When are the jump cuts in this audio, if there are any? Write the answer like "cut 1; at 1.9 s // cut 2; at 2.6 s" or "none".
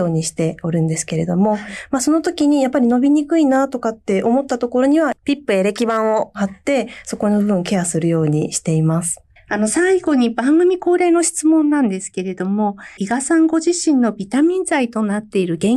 cut 1; at 9.4 s // cut 2; at 13.0 s